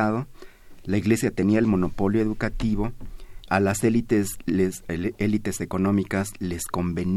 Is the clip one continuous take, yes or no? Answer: no